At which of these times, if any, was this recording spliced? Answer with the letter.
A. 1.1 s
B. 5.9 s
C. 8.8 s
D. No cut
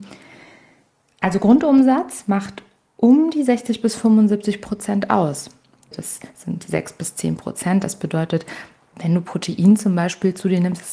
B